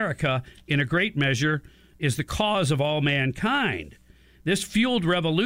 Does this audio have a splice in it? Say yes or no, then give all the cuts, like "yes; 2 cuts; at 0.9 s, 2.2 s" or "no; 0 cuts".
no; 0 cuts